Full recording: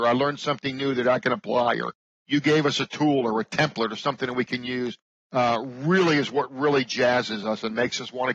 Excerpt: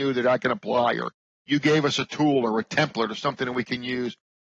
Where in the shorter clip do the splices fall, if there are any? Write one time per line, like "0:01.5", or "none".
none